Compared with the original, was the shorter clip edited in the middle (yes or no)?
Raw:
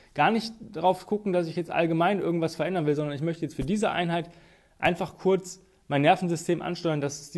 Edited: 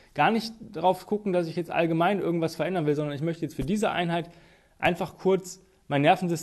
no